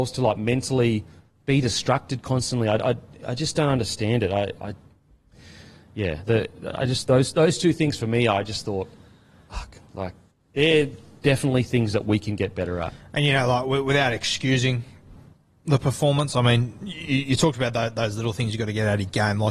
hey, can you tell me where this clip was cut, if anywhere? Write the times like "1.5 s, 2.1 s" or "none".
none

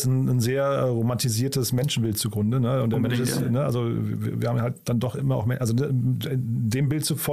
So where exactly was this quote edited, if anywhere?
none

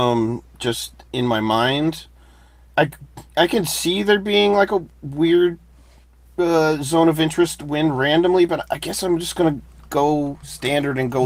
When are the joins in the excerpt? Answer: none

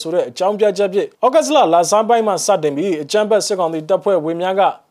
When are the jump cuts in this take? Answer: 1.1 s

